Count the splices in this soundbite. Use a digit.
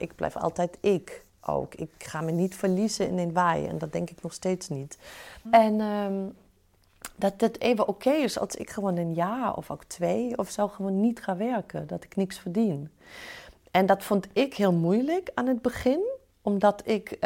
1